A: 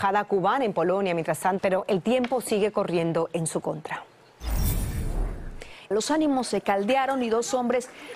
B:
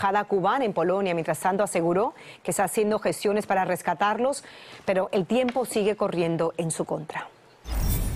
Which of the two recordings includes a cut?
A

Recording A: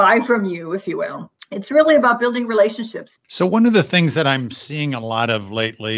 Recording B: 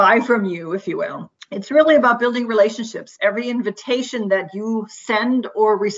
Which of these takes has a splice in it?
A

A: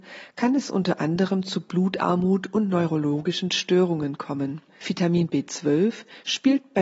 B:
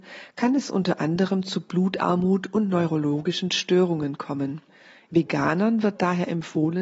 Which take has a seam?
A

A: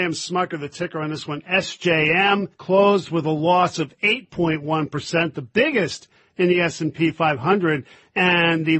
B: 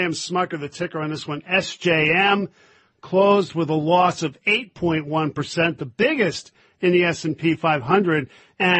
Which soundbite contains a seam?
A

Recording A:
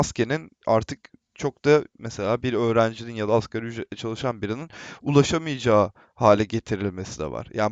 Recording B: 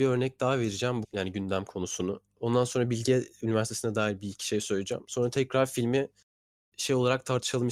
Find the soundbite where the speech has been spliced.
B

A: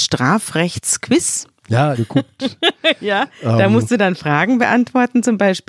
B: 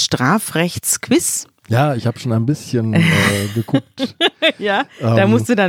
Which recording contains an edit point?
A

